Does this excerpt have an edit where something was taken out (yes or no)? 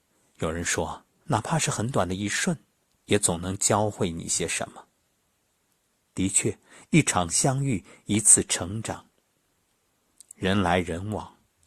yes